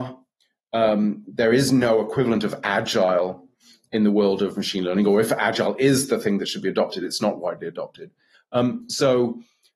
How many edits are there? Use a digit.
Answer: 1